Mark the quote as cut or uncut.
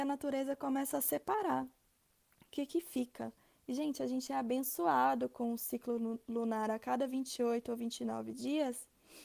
cut